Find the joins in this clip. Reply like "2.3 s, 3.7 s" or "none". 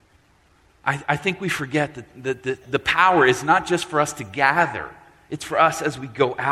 none

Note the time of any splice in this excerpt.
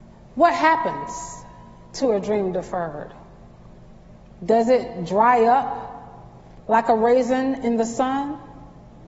none

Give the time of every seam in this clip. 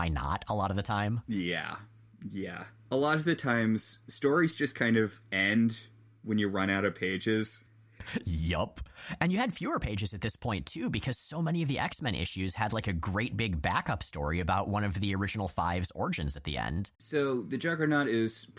4.0 s, 16.9 s

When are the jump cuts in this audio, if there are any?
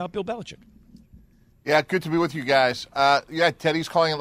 none

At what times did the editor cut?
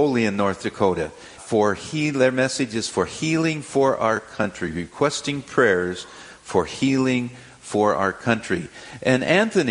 1.4 s

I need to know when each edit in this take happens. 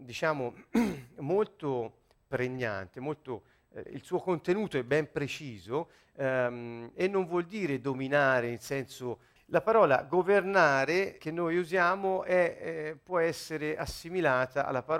3.9 s, 9.4 s, 11.2 s

